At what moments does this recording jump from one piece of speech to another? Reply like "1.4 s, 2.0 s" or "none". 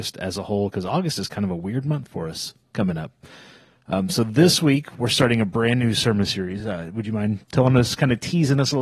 none